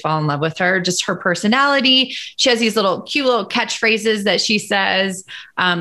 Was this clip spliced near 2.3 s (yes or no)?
no